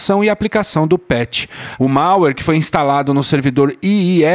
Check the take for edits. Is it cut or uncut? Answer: cut